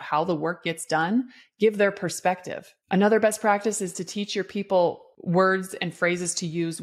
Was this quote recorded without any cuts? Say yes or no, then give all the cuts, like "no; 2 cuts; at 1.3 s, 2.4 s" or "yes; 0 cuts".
yes; 0 cuts